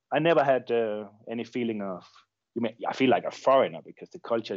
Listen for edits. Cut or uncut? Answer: uncut